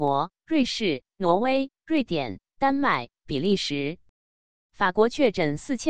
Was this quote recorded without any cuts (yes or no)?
no